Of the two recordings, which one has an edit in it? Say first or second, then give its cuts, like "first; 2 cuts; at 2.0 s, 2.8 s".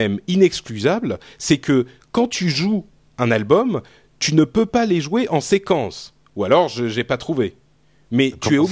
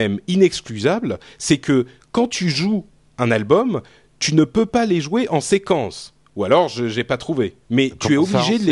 second; 1 cut; at 7.6 s